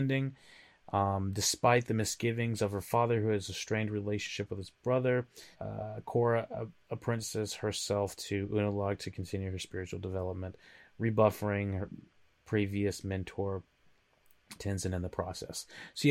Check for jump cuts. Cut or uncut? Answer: cut